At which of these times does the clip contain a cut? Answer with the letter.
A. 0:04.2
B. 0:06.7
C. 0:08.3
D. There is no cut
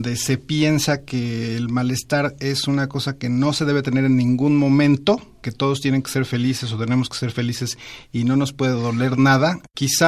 D